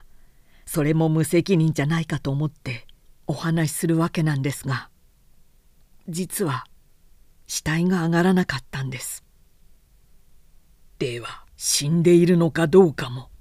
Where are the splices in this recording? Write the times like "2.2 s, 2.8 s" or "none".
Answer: 11.5 s